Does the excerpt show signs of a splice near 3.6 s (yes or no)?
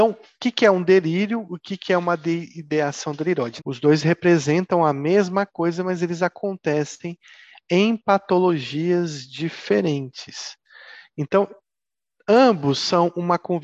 yes